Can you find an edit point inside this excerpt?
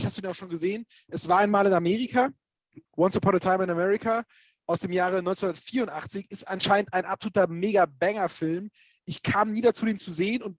yes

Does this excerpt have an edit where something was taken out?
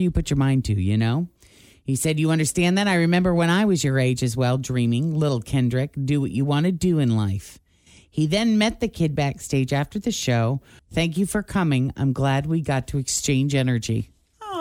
yes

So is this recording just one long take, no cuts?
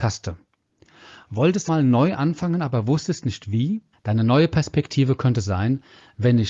no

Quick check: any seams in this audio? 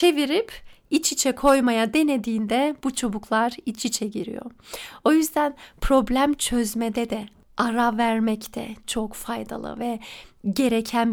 yes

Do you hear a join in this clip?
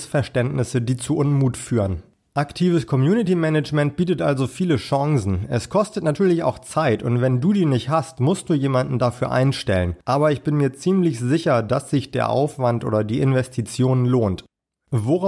no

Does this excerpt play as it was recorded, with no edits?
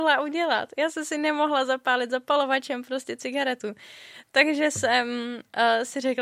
yes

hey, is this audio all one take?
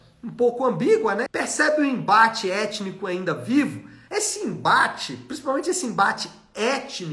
no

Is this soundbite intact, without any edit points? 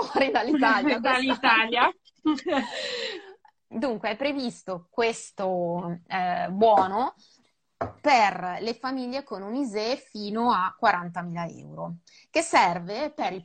no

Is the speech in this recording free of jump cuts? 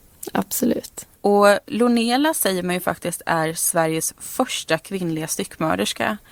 no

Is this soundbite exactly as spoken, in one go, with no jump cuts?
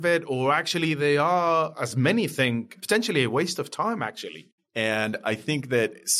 no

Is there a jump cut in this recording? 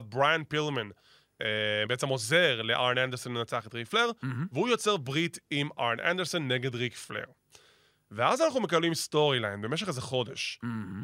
yes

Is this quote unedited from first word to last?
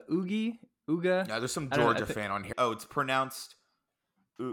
no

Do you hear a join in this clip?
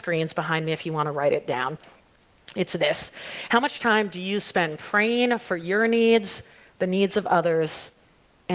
no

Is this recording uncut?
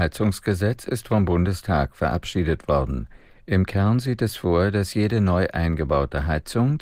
yes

